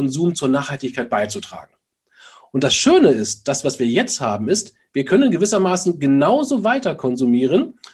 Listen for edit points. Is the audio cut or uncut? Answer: uncut